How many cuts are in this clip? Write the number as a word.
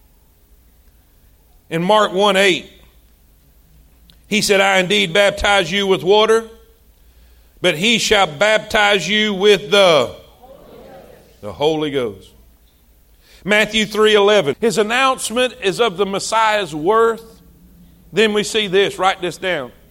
one